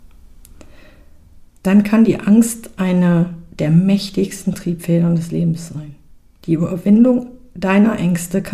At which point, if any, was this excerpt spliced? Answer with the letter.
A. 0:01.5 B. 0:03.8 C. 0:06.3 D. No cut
D